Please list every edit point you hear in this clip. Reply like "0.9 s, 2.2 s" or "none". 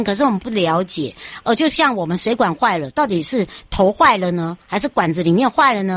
none